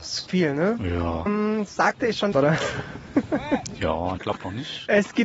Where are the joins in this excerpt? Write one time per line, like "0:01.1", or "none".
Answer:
0:01.3
0:02.3
0:04.2